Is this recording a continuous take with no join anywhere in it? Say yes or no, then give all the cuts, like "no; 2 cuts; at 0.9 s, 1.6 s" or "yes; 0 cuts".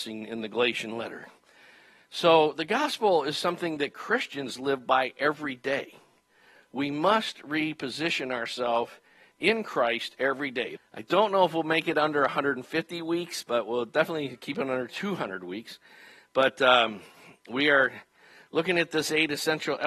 no; 1 cut; at 10.8 s